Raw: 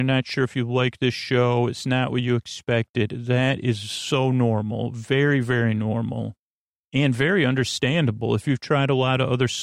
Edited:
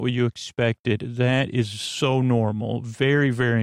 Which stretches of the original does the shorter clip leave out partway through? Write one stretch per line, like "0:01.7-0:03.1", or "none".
none